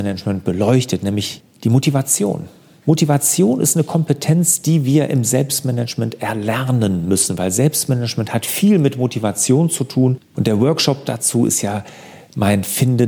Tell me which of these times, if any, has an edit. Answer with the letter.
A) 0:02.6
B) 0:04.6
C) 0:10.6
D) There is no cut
D